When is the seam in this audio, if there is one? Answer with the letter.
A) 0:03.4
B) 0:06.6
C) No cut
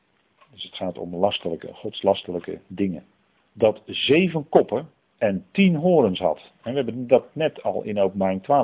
A